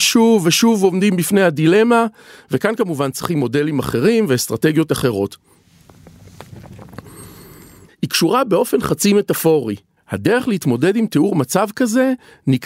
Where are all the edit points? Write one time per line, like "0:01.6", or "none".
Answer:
0:07.9
0:10.0

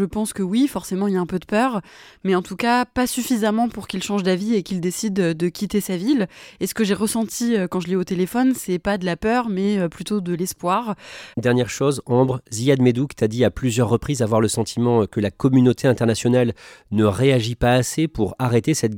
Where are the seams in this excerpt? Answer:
0:11.3

